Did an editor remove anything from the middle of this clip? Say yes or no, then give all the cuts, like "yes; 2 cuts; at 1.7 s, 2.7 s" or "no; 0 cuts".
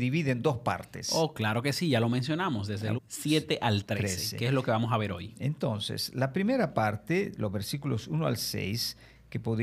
yes; 1 cut; at 3.0 s